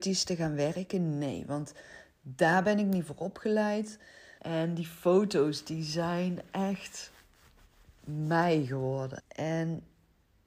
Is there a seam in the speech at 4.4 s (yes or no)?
yes